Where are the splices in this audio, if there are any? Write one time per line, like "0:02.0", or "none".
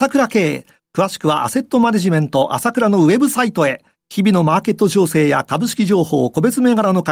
0:04.0